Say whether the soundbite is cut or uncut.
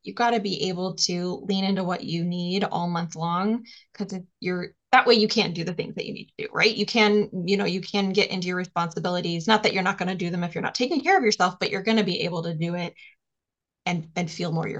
uncut